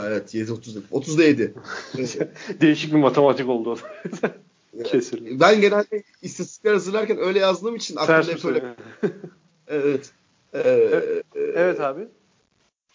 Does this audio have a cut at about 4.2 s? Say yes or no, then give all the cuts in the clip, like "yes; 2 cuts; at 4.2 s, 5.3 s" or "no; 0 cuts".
no; 0 cuts